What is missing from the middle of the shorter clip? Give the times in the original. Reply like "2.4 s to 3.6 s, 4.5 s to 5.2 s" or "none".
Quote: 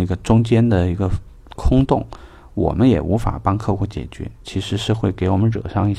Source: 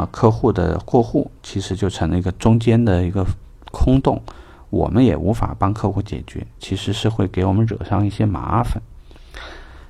none